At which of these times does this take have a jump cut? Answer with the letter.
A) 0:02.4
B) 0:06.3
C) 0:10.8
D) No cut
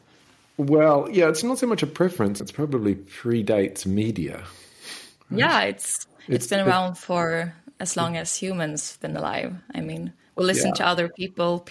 A